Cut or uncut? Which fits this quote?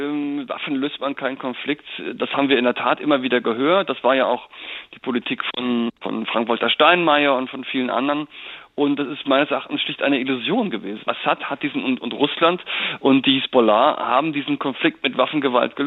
cut